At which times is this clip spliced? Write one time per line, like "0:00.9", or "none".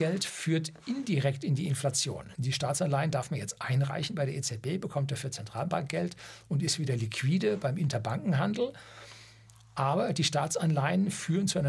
0:02.3